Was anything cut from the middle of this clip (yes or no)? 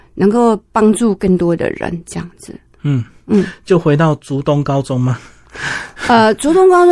no